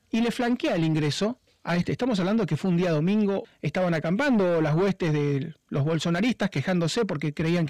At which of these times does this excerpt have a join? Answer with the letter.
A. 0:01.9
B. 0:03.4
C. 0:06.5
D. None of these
B